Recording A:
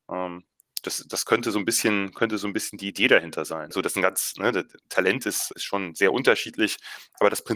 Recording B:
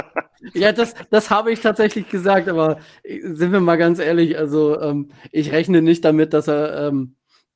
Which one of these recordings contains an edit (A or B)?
A